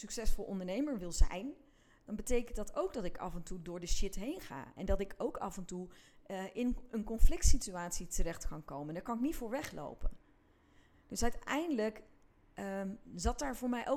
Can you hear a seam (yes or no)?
no